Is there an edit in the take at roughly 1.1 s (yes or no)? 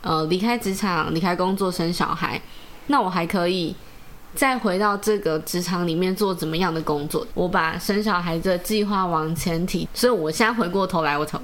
no